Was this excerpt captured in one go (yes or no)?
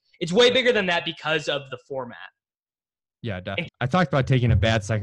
no